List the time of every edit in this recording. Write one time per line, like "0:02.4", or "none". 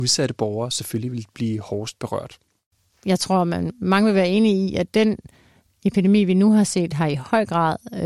none